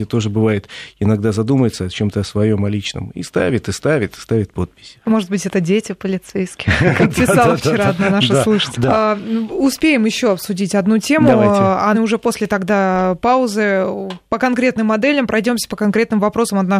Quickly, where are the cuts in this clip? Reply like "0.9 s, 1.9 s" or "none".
8.7 s, 11.9 s